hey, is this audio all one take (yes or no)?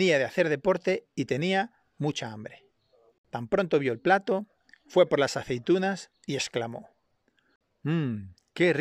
yes